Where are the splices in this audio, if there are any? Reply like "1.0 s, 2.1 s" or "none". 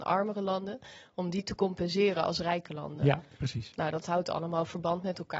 none